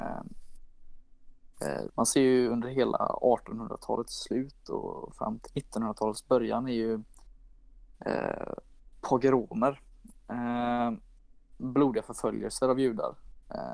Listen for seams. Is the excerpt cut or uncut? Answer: cut